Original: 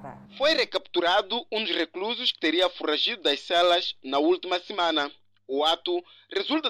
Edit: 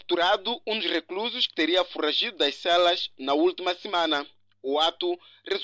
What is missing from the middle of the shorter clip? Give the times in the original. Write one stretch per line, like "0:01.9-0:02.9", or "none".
none